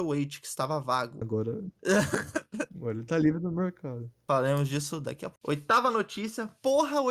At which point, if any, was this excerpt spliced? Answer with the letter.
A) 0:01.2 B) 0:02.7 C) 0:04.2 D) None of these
A